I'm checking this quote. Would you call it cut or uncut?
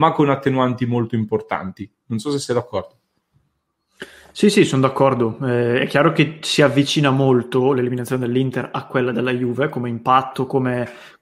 uncut